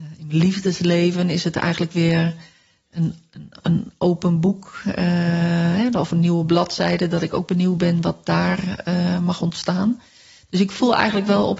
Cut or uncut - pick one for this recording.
uncut